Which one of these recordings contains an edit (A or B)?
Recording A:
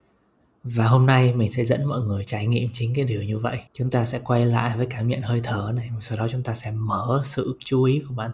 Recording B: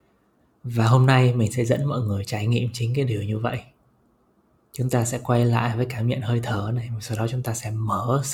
A